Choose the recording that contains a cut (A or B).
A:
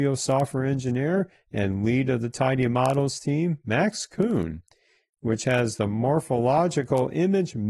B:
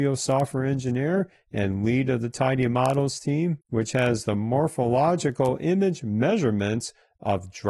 B